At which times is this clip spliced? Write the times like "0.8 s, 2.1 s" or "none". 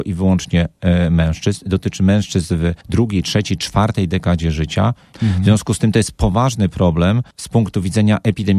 5.1 s